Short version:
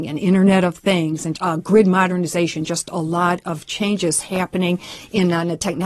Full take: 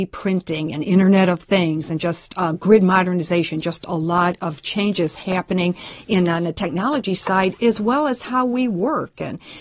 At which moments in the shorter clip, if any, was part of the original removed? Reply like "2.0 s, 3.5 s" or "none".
1.3 s